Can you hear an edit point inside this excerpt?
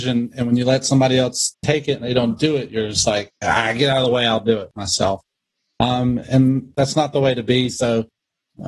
no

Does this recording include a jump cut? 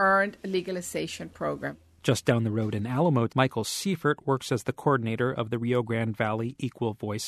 yes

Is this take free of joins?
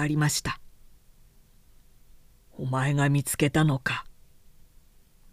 yes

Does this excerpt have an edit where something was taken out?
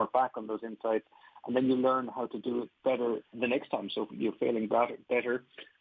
yes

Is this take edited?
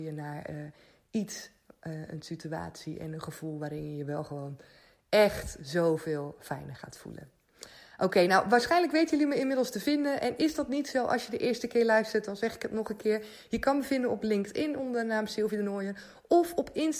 no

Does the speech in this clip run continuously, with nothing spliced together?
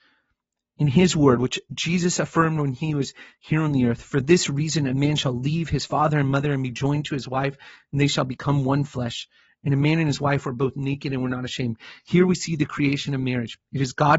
yes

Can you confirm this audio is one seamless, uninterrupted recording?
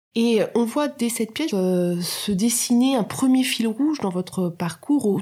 no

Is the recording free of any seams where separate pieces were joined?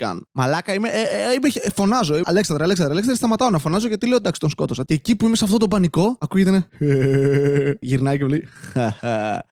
no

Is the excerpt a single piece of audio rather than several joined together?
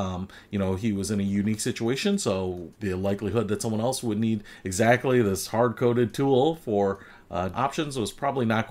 no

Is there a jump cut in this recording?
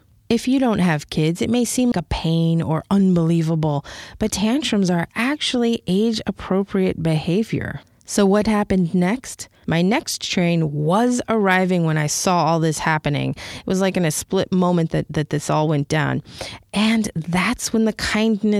yes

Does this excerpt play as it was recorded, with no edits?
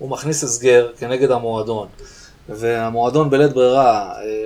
yes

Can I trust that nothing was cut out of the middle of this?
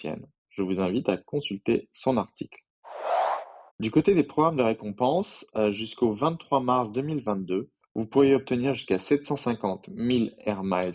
no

